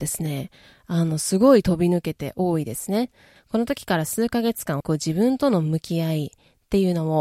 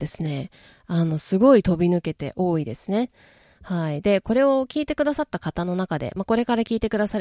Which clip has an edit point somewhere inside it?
first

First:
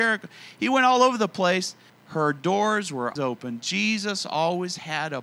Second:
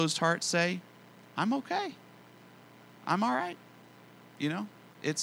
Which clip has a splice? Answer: first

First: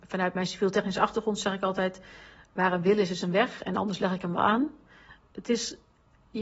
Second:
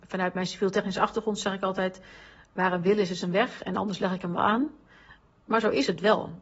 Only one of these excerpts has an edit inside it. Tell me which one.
first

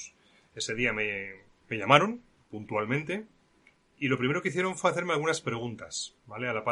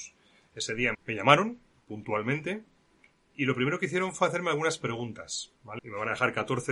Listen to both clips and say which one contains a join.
second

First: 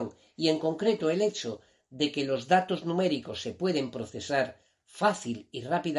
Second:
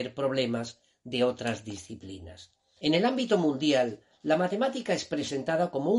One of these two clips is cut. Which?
second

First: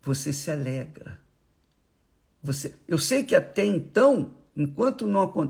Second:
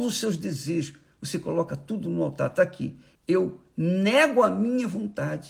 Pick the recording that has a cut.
second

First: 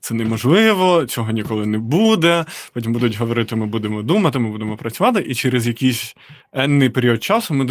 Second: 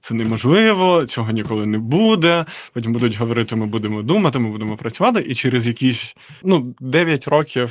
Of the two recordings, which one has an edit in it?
second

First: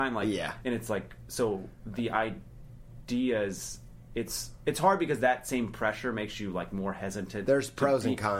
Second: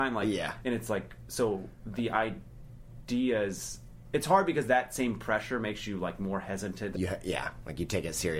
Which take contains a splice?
second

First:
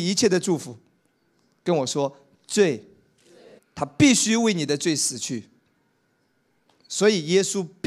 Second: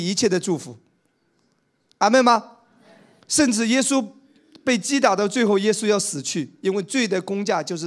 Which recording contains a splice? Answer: first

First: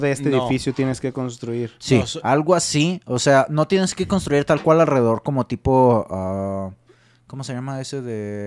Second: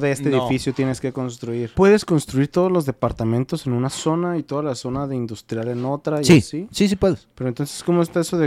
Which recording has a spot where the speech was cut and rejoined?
second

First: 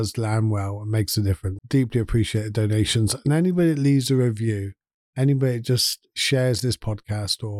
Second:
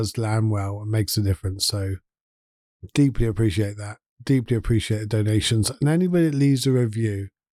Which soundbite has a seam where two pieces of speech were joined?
first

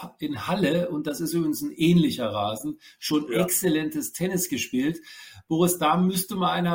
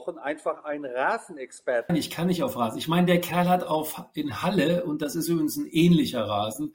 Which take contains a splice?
second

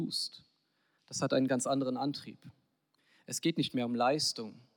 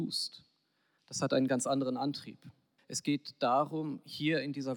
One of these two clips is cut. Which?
second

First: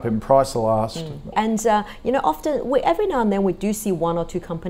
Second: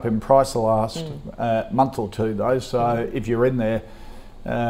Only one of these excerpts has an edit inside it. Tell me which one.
first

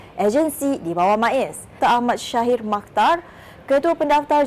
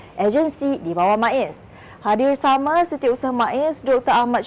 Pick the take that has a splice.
first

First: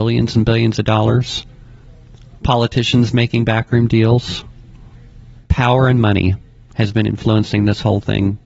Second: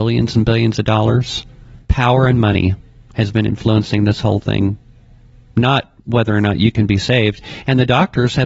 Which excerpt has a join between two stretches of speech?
second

